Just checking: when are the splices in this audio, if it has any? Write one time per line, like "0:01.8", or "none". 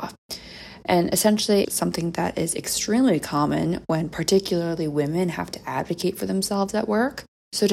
0:01.6